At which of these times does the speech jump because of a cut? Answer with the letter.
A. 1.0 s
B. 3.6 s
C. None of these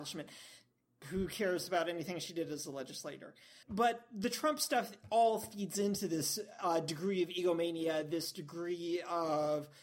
B